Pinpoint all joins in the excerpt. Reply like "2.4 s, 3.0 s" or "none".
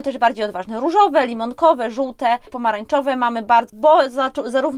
3.7 s